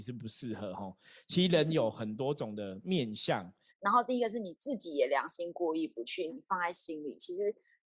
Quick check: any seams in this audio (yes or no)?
yes